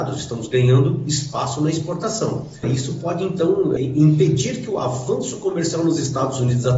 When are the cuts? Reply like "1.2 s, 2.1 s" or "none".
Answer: 2.6 s, 3.8 s